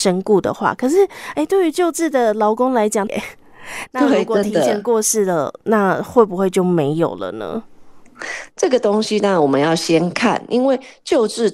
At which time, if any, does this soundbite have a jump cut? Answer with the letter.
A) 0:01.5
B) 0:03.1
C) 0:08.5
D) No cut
B